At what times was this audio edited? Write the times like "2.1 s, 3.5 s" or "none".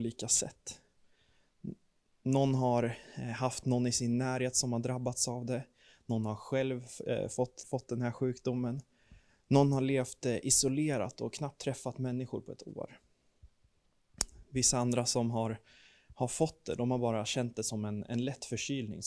7.6 s

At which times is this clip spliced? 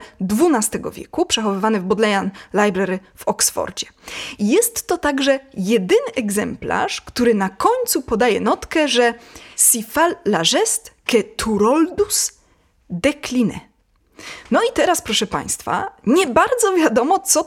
none

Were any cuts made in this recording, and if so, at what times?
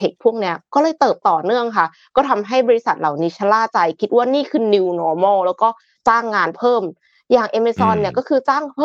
1.2 s

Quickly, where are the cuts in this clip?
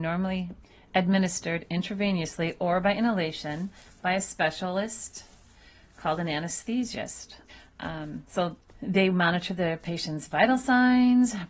none

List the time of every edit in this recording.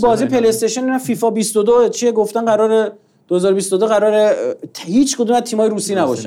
none

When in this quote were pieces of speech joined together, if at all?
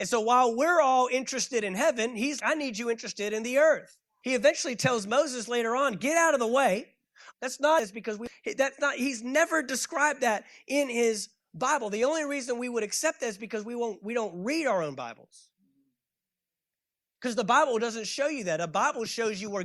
2.4 s, 4.2 s, 7.3 s

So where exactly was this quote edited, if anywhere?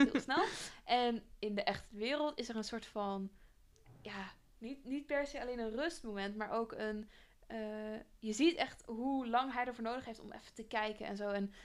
none

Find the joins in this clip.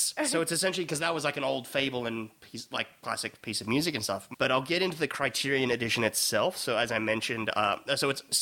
4.3 s

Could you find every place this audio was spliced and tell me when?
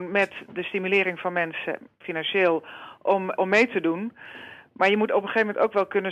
3.4 s

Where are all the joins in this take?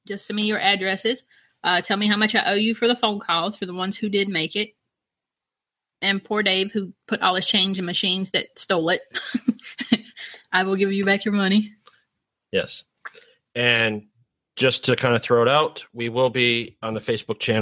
none

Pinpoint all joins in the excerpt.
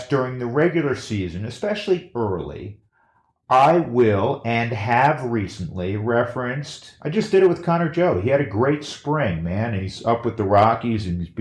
none

